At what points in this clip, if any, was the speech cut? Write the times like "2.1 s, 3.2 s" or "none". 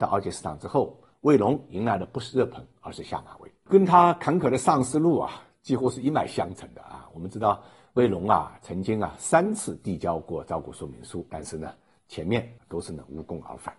none